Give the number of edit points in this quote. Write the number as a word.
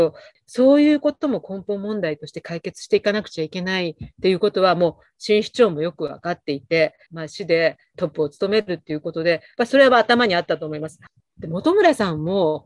two